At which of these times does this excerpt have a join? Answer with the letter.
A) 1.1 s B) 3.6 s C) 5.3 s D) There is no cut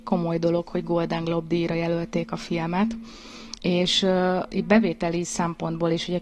B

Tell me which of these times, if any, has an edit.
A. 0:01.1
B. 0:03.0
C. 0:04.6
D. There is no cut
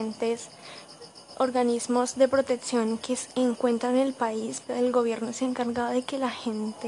C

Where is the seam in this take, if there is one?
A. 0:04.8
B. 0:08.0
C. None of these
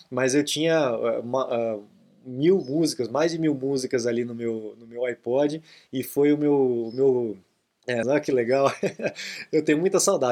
B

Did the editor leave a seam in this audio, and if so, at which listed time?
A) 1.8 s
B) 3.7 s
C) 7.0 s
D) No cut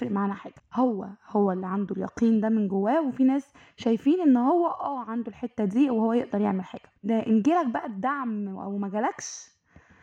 C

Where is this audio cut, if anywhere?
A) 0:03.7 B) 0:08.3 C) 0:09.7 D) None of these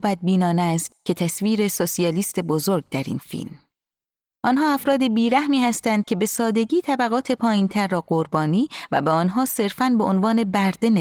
D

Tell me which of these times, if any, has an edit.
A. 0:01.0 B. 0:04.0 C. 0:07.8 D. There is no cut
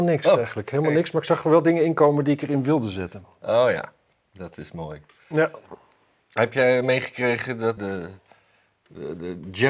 C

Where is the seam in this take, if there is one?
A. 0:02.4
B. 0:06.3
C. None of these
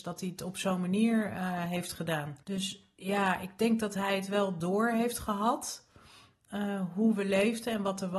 A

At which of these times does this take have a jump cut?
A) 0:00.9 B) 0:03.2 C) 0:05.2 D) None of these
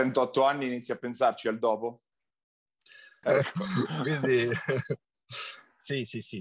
B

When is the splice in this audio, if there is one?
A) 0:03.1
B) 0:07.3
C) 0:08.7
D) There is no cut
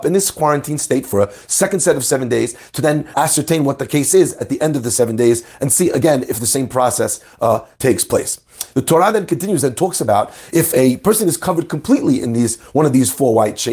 A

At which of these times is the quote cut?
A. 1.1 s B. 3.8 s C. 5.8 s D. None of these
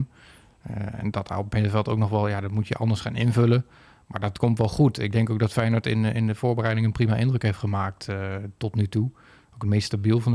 A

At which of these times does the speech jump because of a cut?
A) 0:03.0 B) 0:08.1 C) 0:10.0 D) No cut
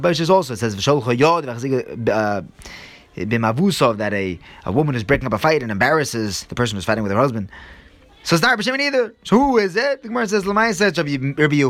B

